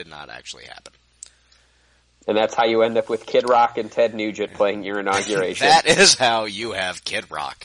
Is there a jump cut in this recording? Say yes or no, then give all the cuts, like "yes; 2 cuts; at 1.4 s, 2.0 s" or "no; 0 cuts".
no; 0 cuts